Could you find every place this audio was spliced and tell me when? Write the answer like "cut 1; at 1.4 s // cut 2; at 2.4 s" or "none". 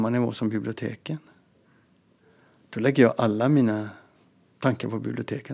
none

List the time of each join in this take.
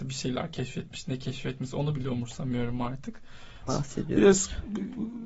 cut 1; at 3.7 s

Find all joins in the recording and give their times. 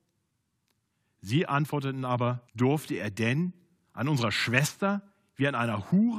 cut 1; at 2.5 s

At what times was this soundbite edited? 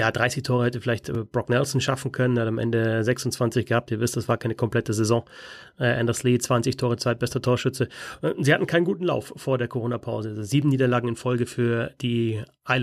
none

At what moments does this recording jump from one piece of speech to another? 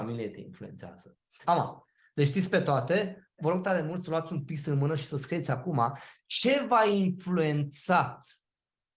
cut 1; at 1.4 s // cut 2; at 3.4 s

